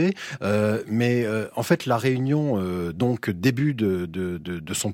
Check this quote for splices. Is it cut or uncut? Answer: uncut